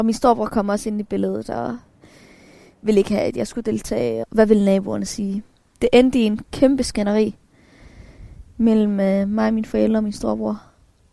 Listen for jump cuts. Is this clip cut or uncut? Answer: cut